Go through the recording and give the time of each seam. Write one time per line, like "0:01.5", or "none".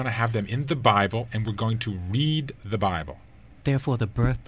none